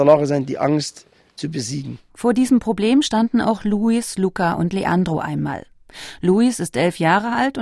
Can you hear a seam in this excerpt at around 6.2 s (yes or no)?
no